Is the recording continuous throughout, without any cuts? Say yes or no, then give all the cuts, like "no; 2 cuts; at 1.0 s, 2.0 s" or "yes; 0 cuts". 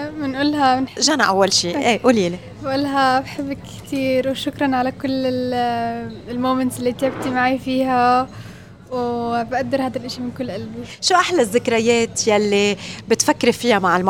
no; 1 cut; at 1.0 s